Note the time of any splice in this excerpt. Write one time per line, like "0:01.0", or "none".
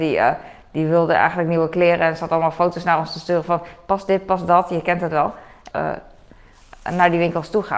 0:05.7